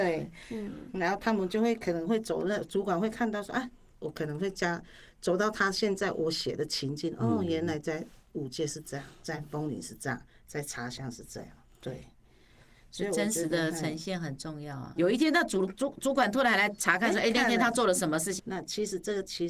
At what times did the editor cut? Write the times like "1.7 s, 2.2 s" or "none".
15.0 s, 18.4 s